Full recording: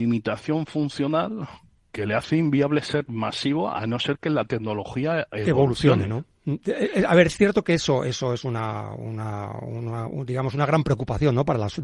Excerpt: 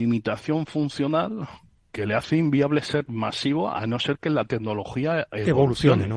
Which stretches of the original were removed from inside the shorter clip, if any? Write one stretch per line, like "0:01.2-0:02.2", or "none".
none